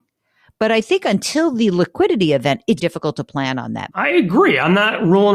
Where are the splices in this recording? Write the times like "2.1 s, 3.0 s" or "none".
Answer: 2.8 s, 3.9 s